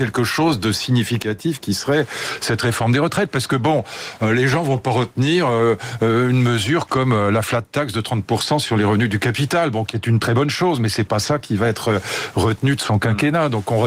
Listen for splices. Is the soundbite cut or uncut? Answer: uncut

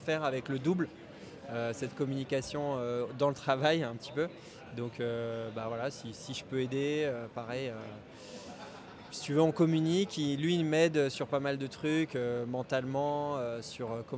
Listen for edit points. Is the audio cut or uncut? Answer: uncut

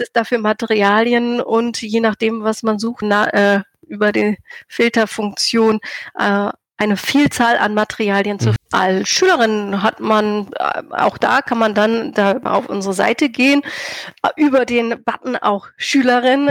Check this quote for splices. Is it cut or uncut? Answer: cut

